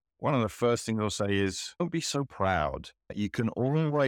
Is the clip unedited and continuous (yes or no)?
yes